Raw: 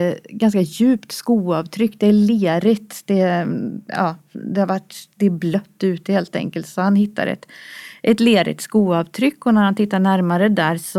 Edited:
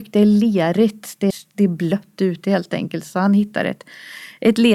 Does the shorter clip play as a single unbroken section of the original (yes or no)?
no